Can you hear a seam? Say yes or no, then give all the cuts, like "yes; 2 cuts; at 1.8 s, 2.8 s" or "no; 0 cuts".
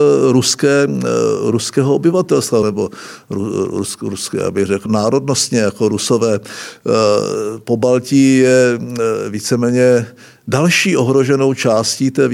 yes; 2 cuts; at 2.6 s, 4.9 s